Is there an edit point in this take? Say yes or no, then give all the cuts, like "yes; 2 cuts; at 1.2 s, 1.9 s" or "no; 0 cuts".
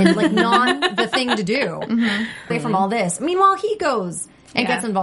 yes; 1 cut; at 2.5 s